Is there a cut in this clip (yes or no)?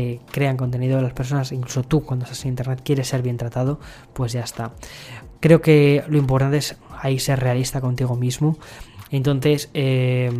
yes